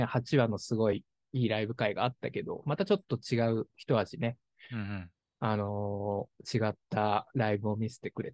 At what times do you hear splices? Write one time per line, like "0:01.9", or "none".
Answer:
none